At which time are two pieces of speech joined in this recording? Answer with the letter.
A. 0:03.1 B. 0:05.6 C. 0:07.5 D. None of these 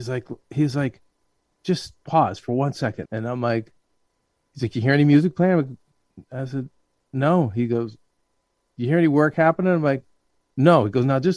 A